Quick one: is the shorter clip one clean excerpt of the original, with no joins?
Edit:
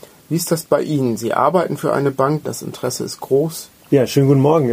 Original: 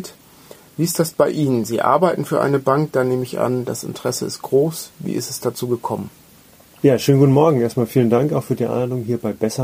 no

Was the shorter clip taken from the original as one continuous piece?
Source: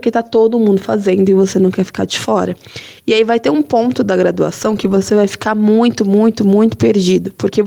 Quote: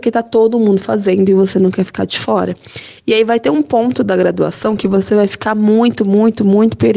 yes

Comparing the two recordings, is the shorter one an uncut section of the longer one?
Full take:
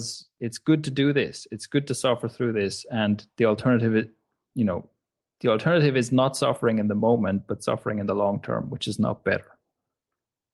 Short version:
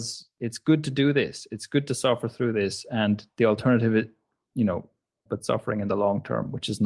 no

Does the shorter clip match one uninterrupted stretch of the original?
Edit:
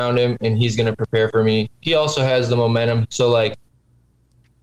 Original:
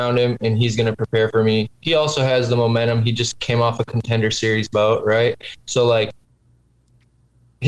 no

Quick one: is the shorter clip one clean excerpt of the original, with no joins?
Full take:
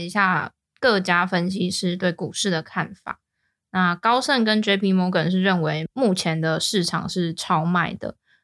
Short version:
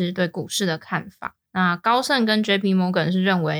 no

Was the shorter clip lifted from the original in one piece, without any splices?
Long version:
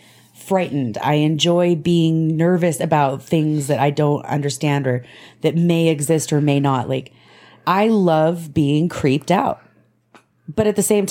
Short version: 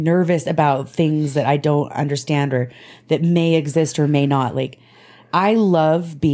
yes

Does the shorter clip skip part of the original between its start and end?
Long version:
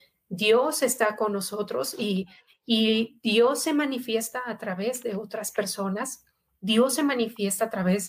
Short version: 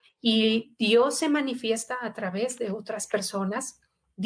no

